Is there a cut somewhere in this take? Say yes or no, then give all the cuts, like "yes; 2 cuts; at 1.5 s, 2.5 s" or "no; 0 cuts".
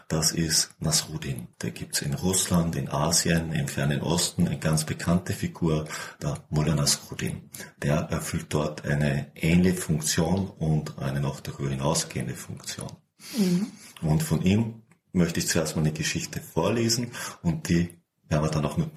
yes; 1 cut; at 1.5 s